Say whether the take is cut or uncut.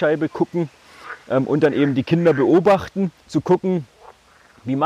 cut